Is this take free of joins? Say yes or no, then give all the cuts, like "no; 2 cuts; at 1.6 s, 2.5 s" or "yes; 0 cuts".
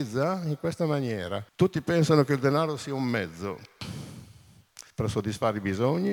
no; 2 cuts; at 1.5 s, 4.9 s